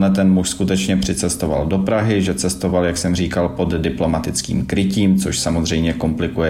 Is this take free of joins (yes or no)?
yes